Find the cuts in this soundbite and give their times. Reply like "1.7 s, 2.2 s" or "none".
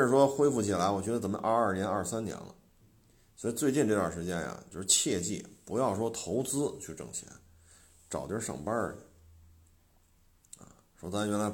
none